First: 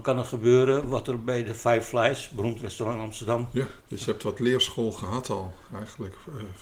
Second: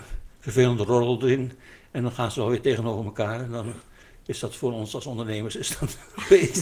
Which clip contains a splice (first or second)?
first